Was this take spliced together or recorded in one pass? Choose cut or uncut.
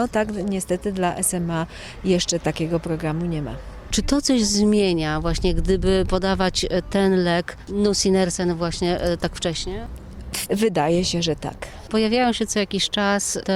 cut